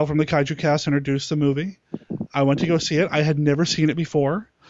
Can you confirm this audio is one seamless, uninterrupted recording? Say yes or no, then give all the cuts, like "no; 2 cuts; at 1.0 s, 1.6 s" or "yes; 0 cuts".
yes; 0 cuts